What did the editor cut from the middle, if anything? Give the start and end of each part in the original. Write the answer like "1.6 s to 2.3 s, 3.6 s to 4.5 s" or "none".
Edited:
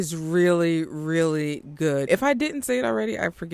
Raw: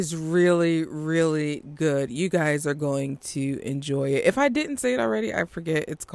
2.1 s to 4.2 s